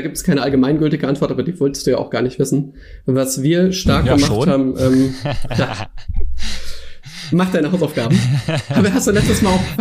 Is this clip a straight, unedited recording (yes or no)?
yes